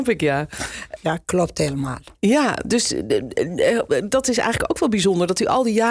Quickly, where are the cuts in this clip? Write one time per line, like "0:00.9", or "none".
0:01.0